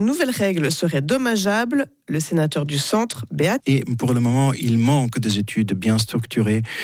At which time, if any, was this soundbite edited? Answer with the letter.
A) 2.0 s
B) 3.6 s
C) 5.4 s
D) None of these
B